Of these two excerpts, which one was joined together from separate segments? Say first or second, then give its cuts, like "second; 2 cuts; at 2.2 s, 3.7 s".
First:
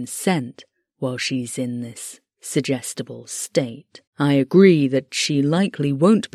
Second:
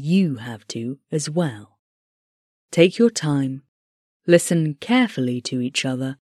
first; 1 cut; at 4.1 s